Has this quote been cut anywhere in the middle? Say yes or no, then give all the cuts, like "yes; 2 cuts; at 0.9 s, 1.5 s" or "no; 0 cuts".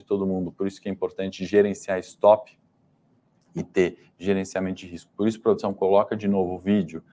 no; 0 cuts